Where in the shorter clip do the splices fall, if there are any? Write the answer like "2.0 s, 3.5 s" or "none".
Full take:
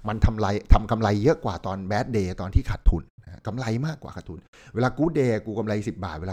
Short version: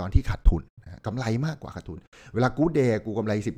none